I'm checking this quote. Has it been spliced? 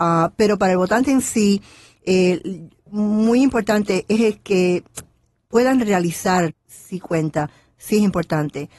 yes; 1 cut; at 6.5 s

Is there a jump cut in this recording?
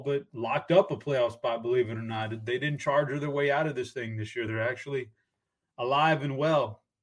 no; 0 cuts

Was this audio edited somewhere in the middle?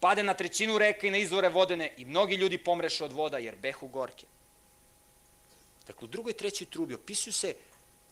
no; 0 cuts

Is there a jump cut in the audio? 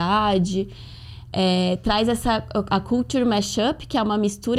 no; 0 cuts

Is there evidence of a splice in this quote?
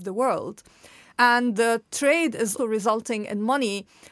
yes; 2 cuts; at 1.1 s, 2.6 s

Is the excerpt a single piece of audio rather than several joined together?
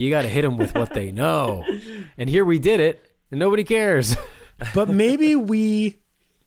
yes; 0 cuts

